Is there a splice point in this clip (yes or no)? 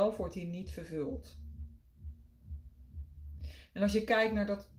no